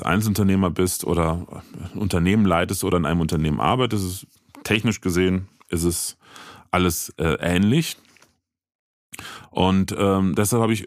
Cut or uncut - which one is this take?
uncut